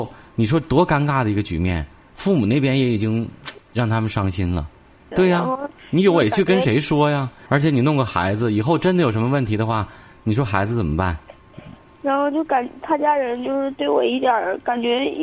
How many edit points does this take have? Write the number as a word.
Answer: two